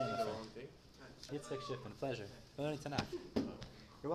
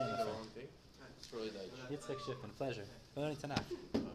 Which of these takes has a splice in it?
first; 1 cut; at 1.3 s

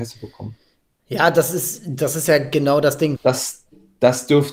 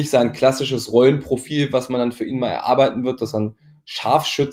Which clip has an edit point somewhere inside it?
first; 1 cut; at 3.2 s

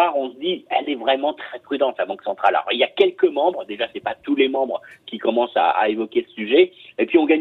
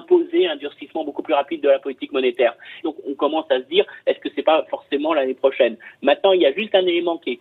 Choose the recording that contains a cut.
second; 1 cut; at 2.8 s

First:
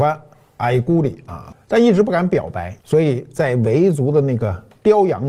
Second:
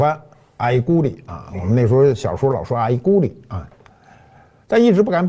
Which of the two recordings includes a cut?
first; 2 cuts; at 1.5 s, 2.8 s

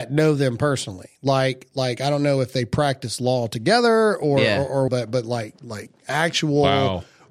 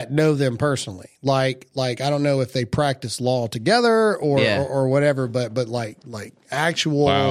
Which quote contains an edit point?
first; 1 cut; at 4.9 s

